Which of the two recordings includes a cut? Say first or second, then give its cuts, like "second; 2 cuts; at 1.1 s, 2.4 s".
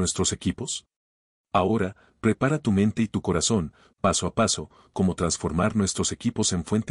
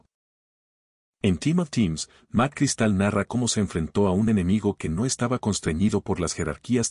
first; 2 cuts; at 1.4 s, 3.9 s